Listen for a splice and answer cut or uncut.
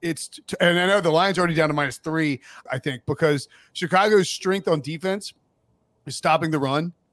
cut